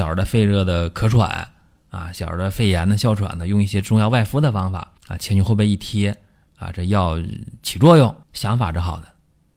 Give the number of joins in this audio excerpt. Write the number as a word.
two